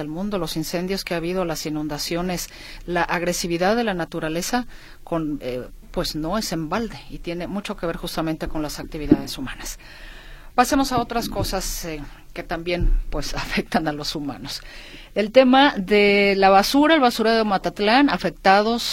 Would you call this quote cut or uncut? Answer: cut